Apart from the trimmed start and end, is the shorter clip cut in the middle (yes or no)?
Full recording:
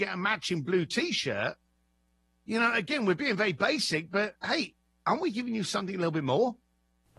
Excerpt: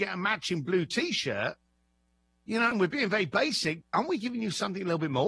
yes